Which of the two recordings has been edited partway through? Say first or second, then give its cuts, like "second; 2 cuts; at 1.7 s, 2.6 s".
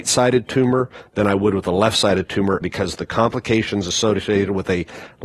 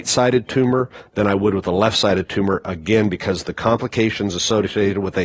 first; 1 cut; at 2.6 s